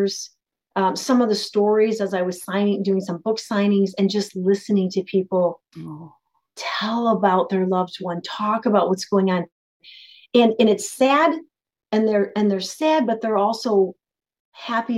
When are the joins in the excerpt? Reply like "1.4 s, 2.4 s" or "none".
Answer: none

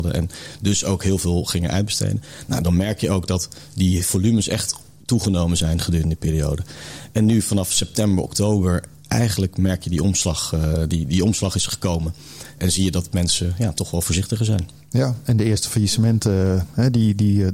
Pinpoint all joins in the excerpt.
none

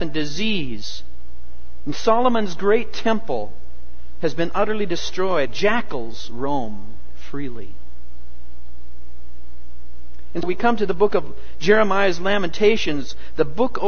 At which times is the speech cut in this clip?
5.5 s, 10.4 s

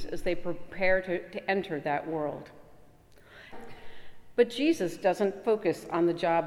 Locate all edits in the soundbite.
3.5 s

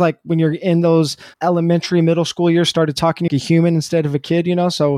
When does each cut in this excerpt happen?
1.3 s, 3.3 s

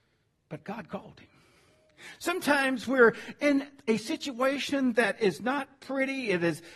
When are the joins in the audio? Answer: 2.2 s

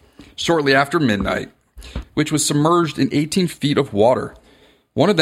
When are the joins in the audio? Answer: 2.0 s

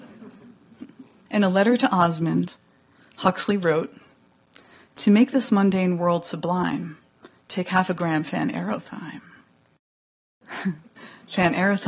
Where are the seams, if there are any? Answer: 1.3 s

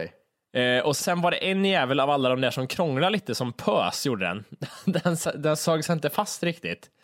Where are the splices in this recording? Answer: 1.0 s

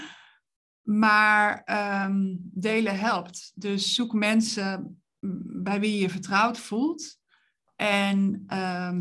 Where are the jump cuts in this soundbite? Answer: none

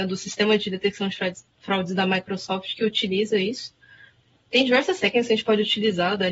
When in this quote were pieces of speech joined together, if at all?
none

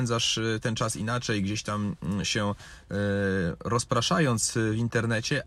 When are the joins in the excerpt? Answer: none

